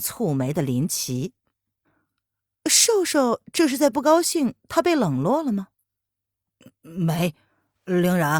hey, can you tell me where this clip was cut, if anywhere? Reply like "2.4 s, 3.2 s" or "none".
none